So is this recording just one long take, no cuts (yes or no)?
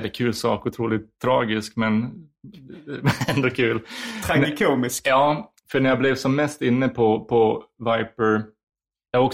yes